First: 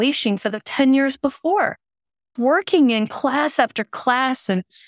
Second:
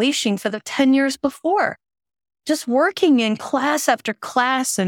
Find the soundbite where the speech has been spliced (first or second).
first